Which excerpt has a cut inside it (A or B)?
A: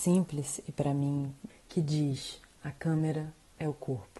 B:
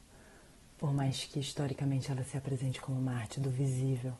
A